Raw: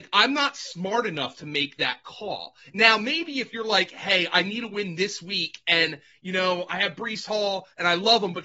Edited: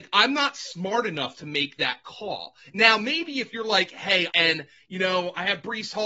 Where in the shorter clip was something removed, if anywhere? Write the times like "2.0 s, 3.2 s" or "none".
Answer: 4.3 s